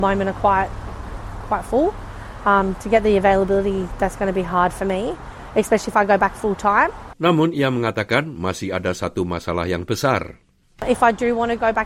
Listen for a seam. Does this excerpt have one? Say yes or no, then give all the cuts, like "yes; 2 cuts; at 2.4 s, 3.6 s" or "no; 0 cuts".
yes; 1 cut; at 7.1 s